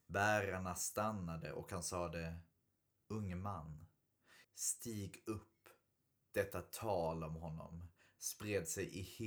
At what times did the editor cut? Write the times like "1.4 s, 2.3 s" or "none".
4.4 s, 6.2 s